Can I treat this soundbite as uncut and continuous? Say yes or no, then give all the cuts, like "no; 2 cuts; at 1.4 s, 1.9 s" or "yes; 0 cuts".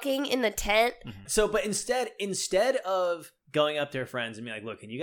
no; 2 cuts; at 1.3 s, 3.4 s